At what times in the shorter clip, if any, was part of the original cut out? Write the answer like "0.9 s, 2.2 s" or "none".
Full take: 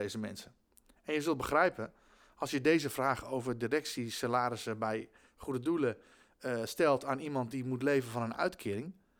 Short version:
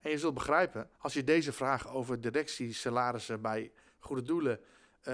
0.9 s